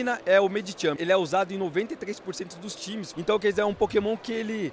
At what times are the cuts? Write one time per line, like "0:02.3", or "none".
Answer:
0:01.0
0:03.1